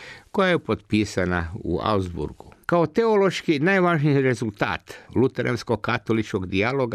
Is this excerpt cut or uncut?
cut